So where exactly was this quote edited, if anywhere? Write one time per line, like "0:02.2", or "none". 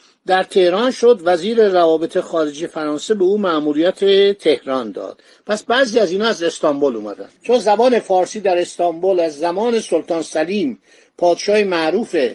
0:07.4